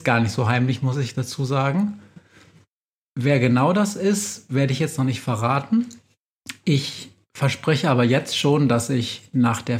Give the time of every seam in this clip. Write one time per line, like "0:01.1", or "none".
none